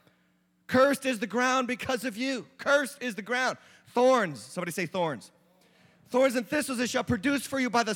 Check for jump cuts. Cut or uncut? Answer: uncut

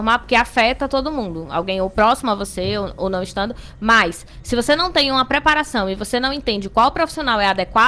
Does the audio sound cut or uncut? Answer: uncut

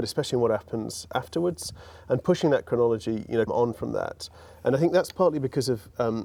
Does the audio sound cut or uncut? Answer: cut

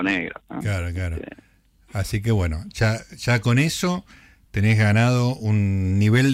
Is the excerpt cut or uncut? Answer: uncut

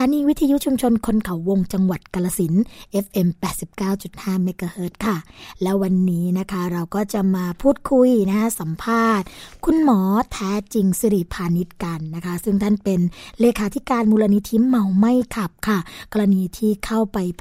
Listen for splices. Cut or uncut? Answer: uncut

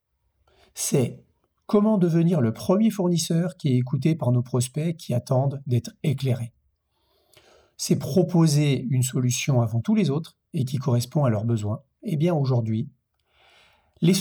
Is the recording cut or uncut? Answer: cut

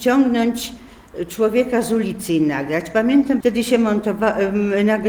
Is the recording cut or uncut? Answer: cut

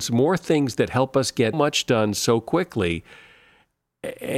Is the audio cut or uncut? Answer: cut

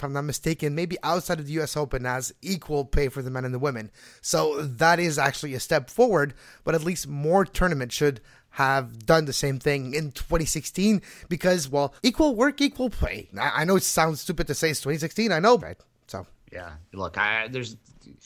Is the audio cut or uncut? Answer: cut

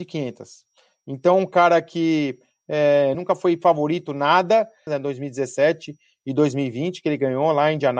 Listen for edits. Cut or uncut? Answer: cut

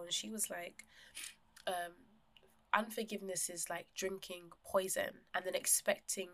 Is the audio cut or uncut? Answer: cut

